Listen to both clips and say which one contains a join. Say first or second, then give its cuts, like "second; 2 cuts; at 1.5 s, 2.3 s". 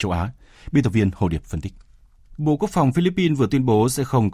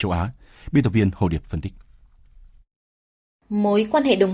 first; 1 cut; at 2.3 s